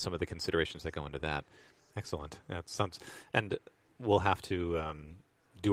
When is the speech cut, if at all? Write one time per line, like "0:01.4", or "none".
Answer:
0:01.9